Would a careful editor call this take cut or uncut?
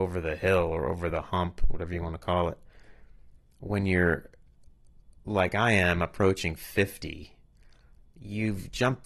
uncut